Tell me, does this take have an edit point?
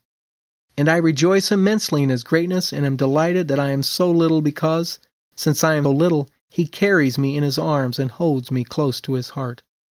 yes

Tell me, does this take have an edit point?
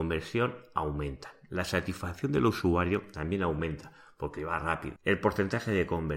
yes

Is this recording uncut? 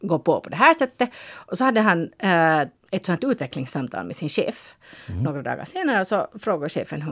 no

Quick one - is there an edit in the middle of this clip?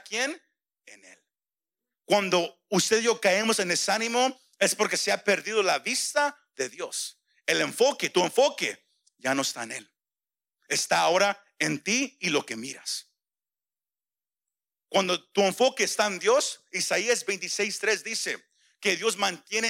yes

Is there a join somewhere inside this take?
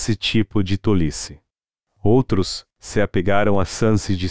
yes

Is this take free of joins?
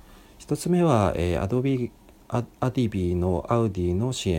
yes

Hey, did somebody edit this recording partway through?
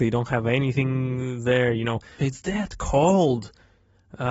yes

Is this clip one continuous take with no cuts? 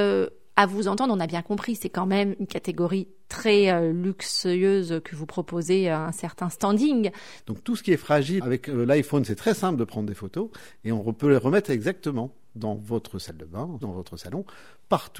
no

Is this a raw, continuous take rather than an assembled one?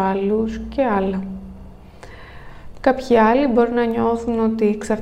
yes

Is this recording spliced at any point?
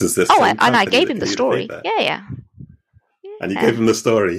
no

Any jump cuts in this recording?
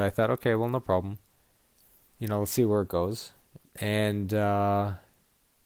yes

